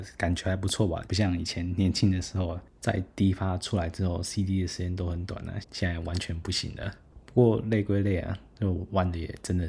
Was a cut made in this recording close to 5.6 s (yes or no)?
yes